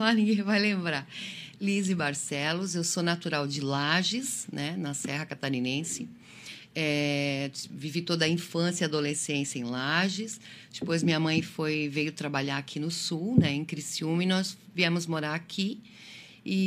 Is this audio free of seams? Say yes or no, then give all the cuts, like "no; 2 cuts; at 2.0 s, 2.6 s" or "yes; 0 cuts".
yes; 0 cuts